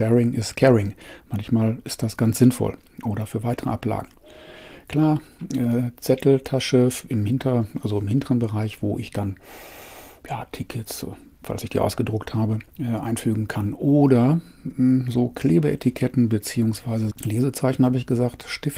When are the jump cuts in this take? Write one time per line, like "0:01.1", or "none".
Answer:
0:12.7
0:17.1